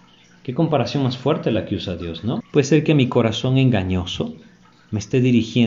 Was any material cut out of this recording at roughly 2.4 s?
yes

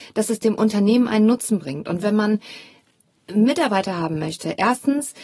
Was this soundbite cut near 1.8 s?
no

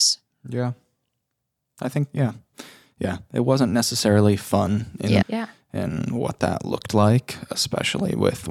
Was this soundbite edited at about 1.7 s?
no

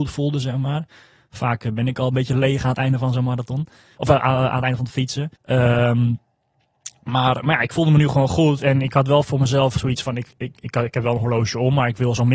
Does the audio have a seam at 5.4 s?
yes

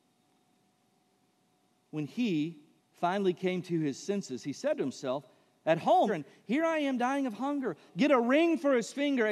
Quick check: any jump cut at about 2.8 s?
yes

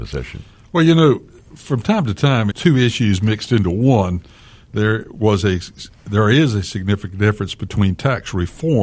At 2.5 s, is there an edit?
yes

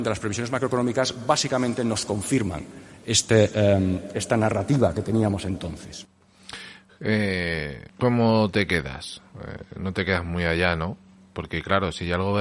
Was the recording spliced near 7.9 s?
yes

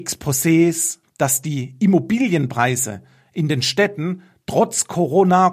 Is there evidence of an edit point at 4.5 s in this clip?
no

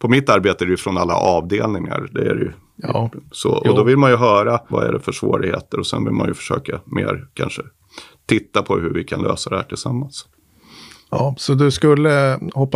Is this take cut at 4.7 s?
yes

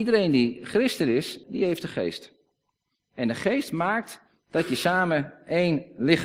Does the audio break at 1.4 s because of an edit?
yes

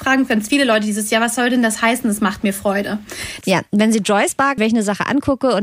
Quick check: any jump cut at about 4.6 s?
yes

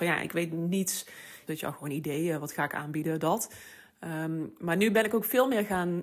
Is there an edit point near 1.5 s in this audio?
yes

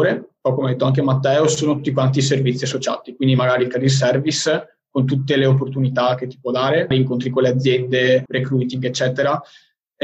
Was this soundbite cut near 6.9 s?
yes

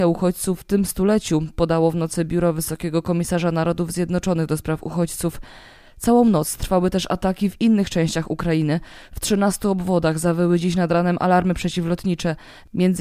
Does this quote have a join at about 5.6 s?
no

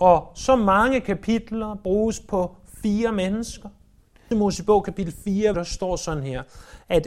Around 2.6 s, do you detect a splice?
no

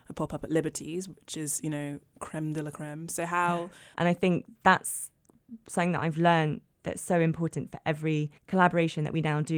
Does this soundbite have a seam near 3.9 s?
yes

